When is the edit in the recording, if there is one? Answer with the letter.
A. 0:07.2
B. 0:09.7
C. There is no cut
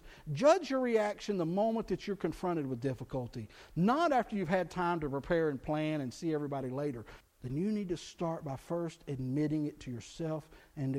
A